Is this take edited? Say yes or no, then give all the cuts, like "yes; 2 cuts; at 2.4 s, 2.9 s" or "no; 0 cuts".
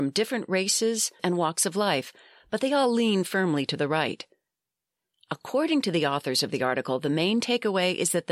yes; 1 cut; at 1.2 s